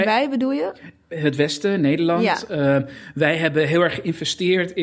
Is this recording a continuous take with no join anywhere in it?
yes; 0 cuts

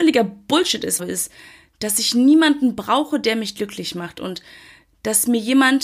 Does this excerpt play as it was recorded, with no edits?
no; 1 cut; at 1.0 s

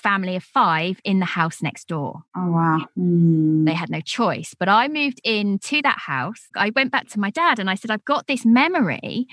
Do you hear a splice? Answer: yes; 2 cuts; at 2.9 s, 6.5 s

